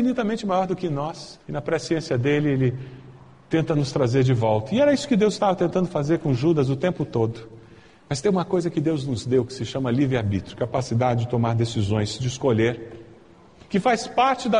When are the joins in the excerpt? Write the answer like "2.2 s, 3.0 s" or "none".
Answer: 1.4 s